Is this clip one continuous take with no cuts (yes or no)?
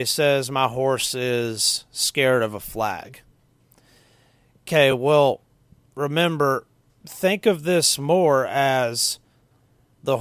yes